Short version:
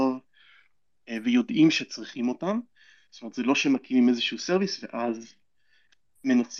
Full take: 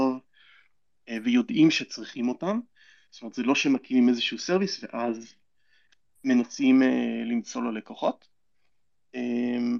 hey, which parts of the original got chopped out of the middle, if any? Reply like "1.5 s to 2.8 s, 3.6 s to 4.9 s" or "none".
none